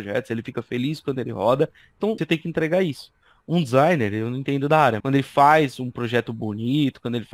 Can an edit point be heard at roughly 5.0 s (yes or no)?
yes